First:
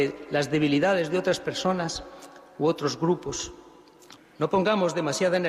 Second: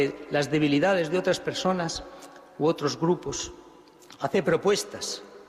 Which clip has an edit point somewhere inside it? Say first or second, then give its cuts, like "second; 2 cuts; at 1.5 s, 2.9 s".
first; 1 cut; at 4.2 s